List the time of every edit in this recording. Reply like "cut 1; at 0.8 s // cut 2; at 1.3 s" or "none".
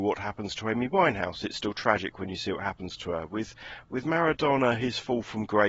none